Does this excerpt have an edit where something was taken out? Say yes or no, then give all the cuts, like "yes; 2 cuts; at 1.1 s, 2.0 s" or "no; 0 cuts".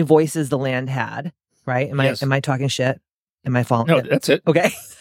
no; 0 cuts